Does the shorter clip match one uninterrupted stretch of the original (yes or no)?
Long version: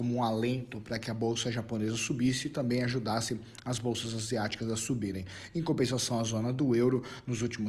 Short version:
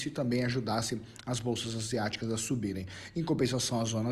yes